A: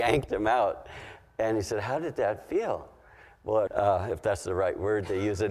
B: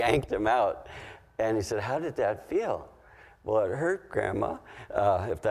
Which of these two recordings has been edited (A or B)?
A